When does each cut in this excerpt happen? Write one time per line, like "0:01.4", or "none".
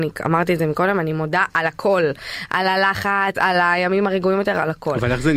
0:03.3